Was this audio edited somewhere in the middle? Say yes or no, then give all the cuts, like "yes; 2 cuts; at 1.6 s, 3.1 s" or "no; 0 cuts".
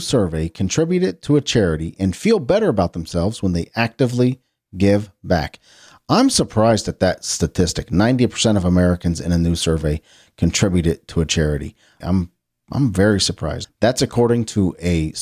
yes; 2 cuts; at 12.0 s, 13.6 s